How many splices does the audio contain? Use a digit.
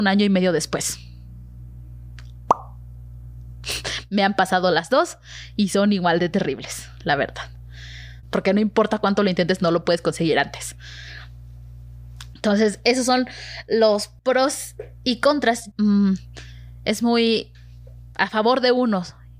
3